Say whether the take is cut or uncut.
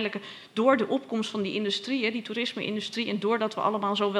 uncut